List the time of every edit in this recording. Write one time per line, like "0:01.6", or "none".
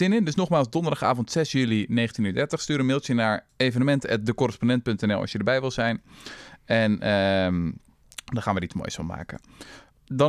none